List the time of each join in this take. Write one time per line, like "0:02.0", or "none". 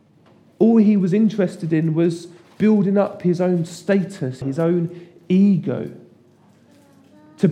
0:04.4